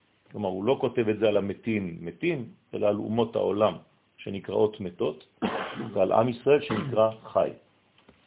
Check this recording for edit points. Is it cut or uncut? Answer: uncut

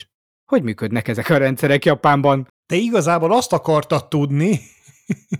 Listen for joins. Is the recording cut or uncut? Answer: uncut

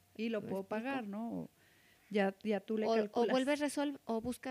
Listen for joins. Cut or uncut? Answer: uncut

